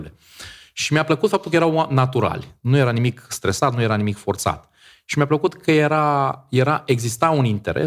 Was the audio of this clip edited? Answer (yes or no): no